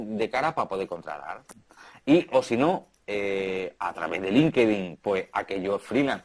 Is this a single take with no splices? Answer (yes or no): yes